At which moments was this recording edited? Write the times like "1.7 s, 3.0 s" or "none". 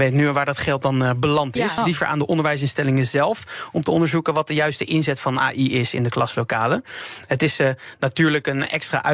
1.8 s